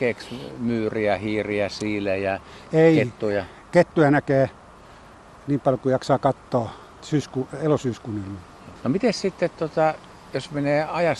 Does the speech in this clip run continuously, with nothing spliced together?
no; 2 cuts; at 7.0 s, 8.8 s

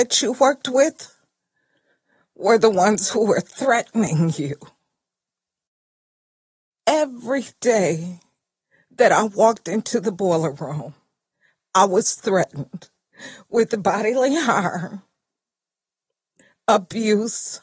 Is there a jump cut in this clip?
no; 0 cuts

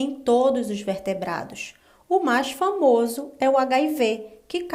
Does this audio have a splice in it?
no; 0 cuts

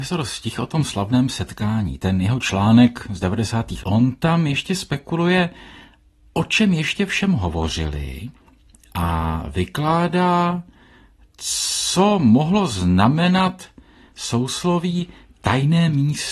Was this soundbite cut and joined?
yes; 1 cut; at 3.8 s

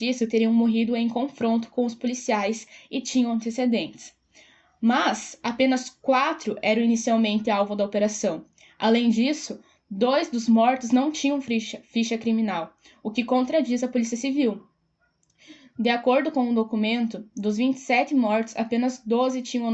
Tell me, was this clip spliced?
no; 0 cuts

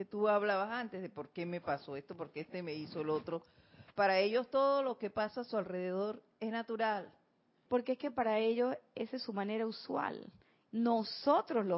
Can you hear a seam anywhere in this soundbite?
yes; 2 cuts; at 7.7 s, 10.7 s

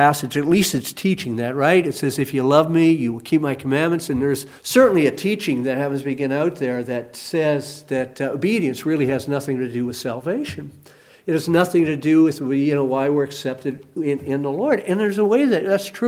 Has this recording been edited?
yes; 1 cut; at 4.6 s

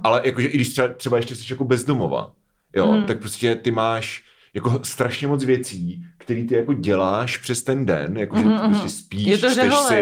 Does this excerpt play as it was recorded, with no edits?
yes; 0 cuts

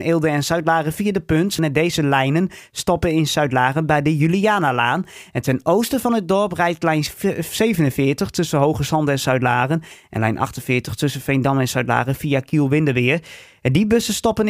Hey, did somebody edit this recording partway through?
yes; 1 cut; at 1.6 s

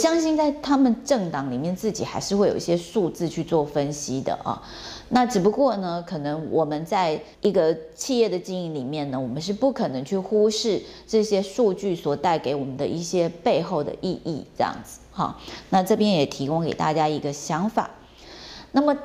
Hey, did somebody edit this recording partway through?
yes; 1 cut; at 7.3 s

